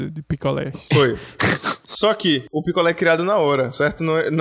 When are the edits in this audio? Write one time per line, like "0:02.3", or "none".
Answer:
none